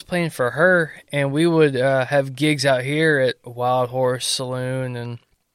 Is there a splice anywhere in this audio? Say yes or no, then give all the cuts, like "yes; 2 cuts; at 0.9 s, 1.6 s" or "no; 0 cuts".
no; 0 cuts